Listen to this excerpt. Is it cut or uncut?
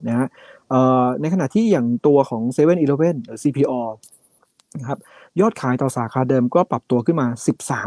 uncut